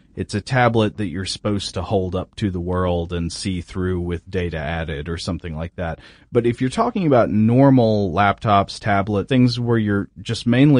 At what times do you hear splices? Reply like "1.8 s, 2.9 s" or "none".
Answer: 9.3 s